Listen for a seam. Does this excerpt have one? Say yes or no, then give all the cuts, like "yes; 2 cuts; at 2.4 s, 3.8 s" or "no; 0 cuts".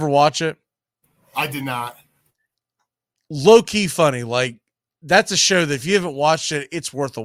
no; 0 cuts